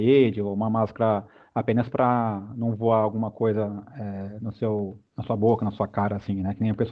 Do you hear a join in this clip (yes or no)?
no